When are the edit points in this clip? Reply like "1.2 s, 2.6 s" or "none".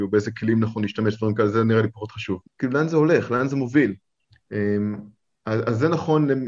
2.4 s, 4.2 s